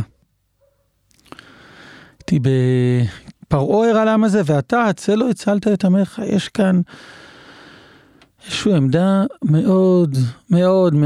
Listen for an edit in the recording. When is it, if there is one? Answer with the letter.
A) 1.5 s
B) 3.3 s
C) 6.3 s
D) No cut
B